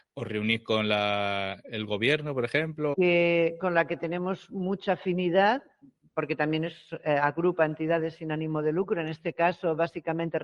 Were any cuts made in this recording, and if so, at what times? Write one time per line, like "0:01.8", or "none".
0:02.9